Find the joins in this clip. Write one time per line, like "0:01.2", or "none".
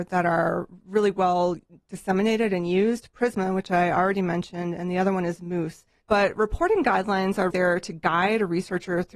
0:06.0
0:07.5